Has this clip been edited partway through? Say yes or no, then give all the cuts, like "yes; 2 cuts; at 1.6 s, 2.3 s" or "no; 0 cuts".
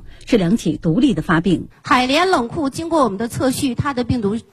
yes; 1 cut; at 1.7 s